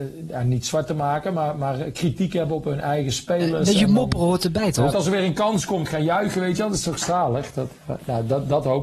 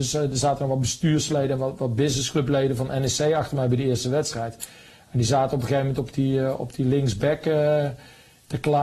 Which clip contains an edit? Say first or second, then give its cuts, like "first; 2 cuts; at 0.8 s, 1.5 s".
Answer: first; 1 cut; at 4.9 s